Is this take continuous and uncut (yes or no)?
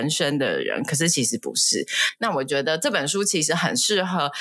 no